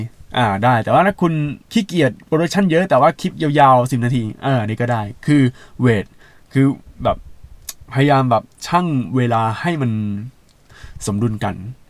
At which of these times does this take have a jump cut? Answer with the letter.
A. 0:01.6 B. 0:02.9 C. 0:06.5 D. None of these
A